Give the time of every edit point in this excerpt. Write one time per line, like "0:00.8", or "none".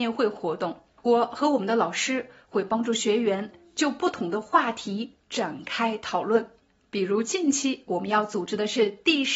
0:01.0